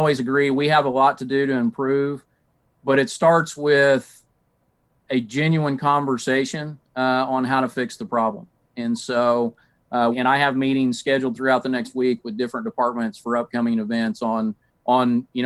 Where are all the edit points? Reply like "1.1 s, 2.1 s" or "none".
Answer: 10.1 s